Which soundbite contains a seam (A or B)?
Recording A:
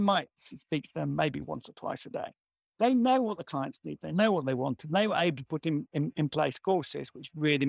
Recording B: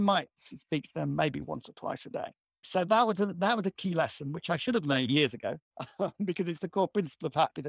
B